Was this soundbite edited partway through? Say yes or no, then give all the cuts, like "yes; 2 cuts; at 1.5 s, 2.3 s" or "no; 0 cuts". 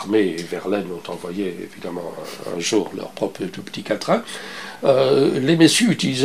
no; 0 cuts